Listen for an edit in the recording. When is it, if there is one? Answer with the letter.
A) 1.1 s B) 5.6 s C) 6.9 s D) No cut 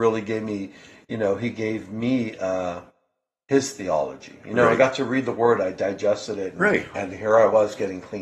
C